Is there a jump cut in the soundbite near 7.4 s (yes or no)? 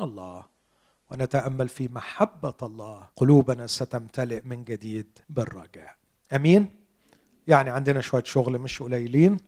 no